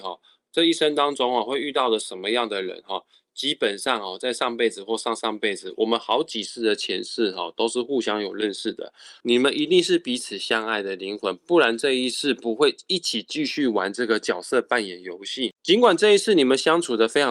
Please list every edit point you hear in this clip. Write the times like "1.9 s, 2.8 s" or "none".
9.2 s